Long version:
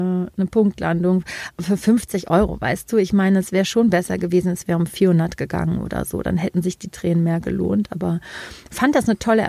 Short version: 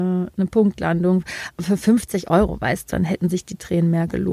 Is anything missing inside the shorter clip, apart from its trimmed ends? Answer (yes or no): yes